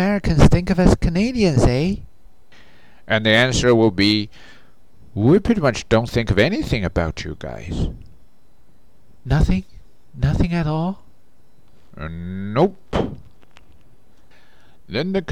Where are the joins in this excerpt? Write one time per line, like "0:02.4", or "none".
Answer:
none